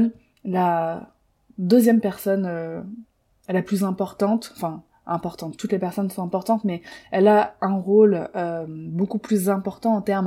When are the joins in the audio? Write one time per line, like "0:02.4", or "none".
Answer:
none

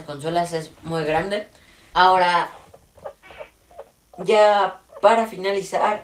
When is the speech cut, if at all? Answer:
0:01.9

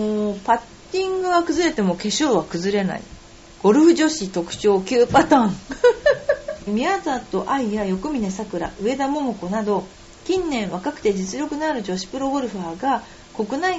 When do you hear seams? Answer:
0:06.7

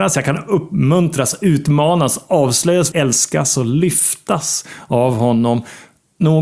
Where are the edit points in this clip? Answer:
0:02.9

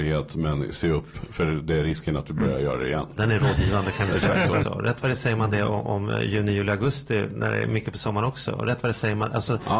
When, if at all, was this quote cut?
0:03.2
0:04.6

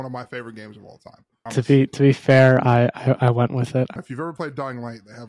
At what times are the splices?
0:01.5
0:04.0

